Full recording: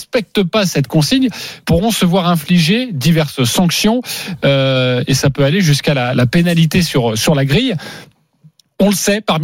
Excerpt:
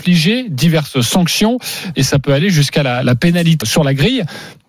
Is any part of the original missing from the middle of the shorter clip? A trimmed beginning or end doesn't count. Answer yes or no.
yes